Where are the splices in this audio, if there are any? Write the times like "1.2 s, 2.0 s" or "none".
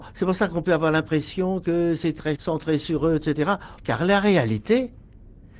3.8 s